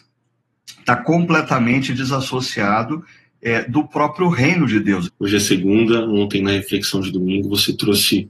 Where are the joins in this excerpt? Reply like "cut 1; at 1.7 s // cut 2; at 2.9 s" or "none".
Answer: cut 1; at 5.1 s